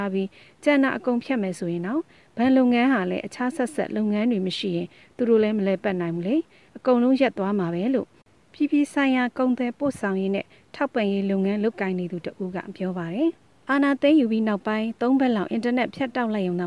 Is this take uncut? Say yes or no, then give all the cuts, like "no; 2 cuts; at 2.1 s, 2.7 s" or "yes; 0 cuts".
yes; 0 cuts